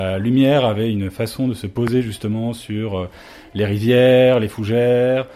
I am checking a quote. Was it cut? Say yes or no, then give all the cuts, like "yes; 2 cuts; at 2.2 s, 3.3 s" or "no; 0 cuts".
no; 0 cuts